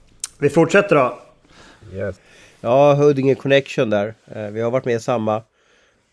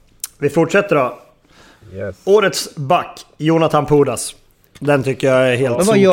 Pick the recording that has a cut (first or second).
first